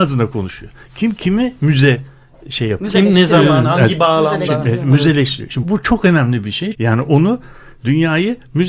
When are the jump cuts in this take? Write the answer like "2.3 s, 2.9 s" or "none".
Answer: 5.6 s, 6.7 s